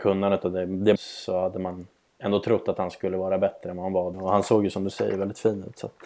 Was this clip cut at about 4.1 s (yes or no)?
yes